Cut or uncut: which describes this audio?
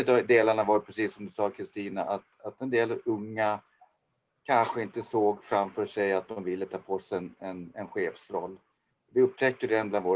uncut